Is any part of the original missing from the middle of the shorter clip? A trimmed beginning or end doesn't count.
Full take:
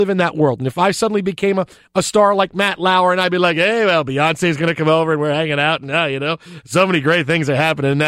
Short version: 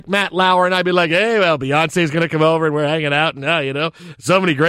no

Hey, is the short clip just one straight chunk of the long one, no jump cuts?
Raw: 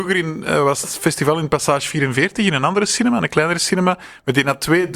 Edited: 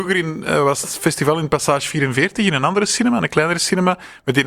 yes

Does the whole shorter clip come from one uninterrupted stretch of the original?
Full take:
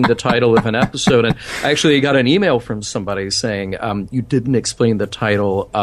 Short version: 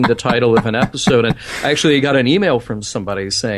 yes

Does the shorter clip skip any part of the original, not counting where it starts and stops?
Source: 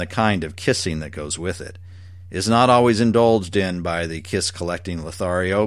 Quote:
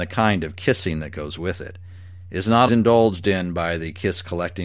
yes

